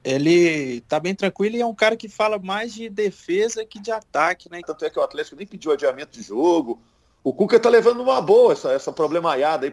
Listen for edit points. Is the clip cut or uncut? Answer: cut